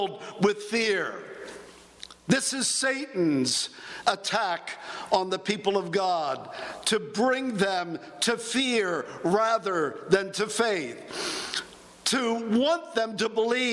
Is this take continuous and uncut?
yes; 0 cuts

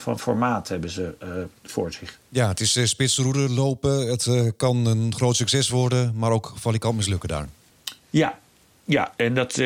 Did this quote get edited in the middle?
no; 0 cuts

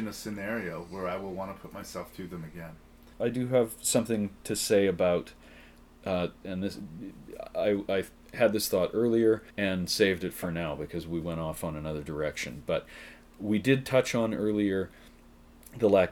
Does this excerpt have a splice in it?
yes; 2 cuts; at 6.4 s, 9.5 s

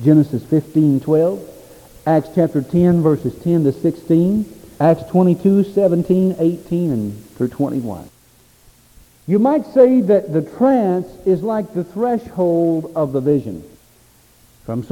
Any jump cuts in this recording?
no; 0 cuts

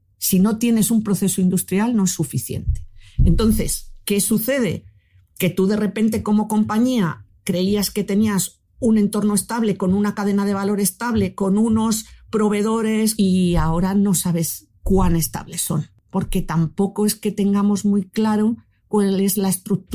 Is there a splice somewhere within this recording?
yes; 1 cut; at 13.2 s

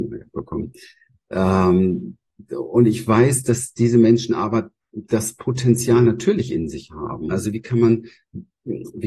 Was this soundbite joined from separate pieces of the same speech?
yes; 1 cut; at 7.3 s

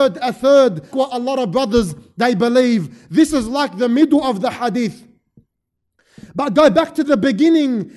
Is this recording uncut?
no; 1 cut; at 0.9 s

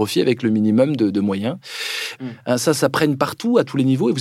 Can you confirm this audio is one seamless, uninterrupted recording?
no; 1 cut; at 2.2 s

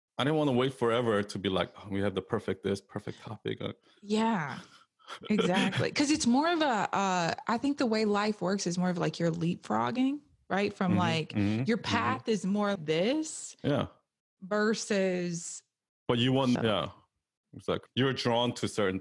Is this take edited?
yes; 3 cuts; at 12.8 s, 16.6 s, 17.9 s

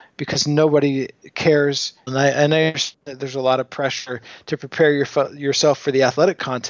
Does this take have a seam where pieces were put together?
yes; 1 cut; at 2.1 s

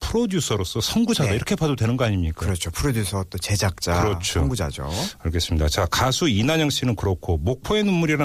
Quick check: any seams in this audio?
no; 0 cuts

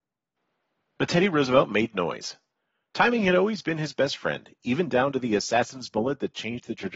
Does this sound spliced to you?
no; 0 cuts

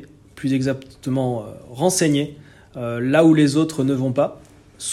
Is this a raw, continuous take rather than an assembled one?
yes; 0 cuts

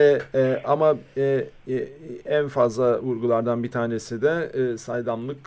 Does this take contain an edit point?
no; 0 cuts

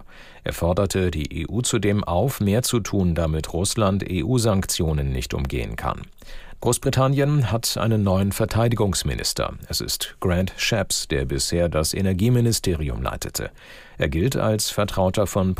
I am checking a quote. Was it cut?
yes; 1 cut; at 6.6 s

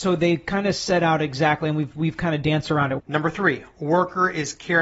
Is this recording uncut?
no; 1 cut; at 3.0 s

